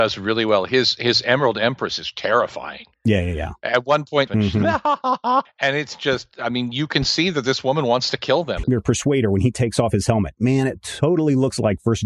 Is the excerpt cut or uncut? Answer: cut